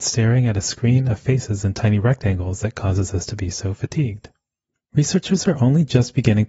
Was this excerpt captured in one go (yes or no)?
no